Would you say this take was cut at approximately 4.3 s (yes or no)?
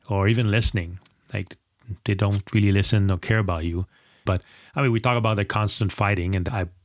yes